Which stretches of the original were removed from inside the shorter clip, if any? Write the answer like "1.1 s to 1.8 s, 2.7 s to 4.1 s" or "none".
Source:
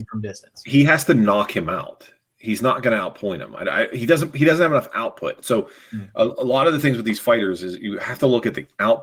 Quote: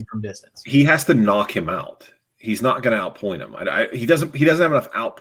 none